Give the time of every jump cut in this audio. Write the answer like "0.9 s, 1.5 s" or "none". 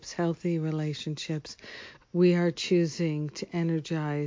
2.0 s